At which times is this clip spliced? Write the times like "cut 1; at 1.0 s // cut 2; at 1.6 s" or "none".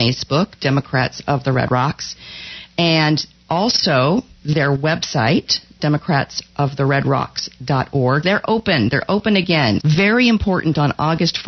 cut 1; at 8.2 s // cut 2; at 9.8 s

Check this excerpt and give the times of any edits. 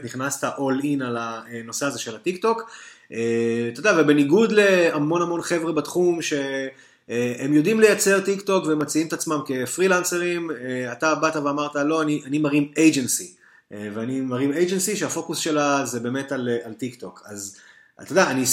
none

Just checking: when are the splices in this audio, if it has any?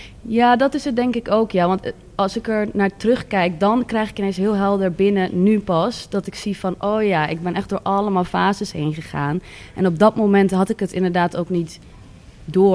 none

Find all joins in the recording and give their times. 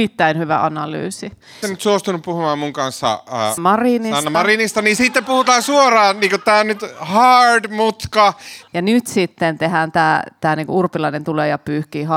cut 1; at 1.6 s // cut 2; at 3.6 s // cut 3; at 8.7 s

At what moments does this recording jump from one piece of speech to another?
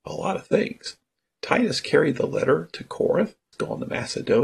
cut 1; at 3.5 s

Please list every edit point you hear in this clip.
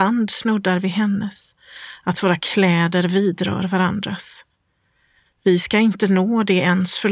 cut 1; at 5.3 s

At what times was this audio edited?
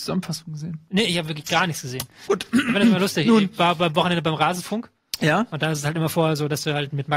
cut 1; at 2.3 s

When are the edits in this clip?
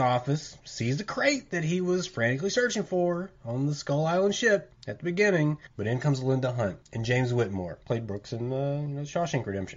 cut 1; at 7.8 s

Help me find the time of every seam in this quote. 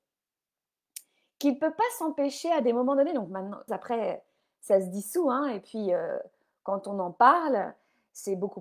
cut 1; at 3.7 s

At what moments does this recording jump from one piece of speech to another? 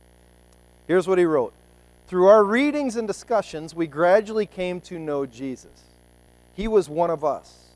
none

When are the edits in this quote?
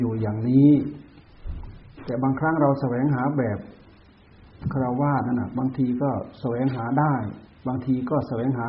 none

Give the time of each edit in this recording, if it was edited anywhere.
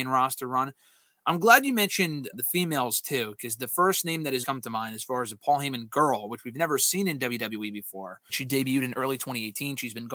cut 1; at 2.3 s // cut 2; at 4.4 s // cut 3; at 8.3 s

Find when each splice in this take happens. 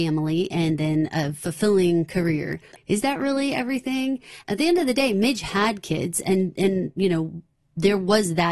cut 1; at 2.8 s

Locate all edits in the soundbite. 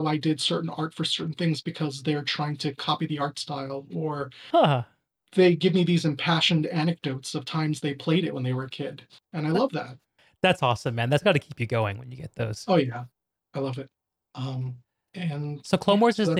none

